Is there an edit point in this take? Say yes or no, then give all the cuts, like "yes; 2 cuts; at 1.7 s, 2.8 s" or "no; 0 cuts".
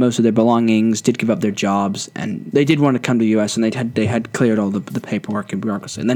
no; 0 cuts